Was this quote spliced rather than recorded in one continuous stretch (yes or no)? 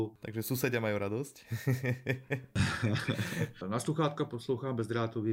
yes